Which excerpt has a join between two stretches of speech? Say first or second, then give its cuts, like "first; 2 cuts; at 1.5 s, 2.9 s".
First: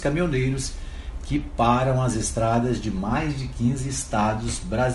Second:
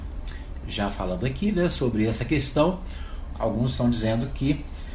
second; 1 cut; at 3.3 s